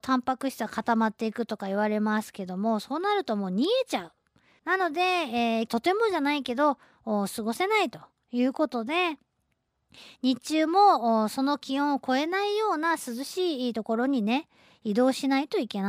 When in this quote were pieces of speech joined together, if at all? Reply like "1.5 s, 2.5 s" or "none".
4.6 s, 5.7 s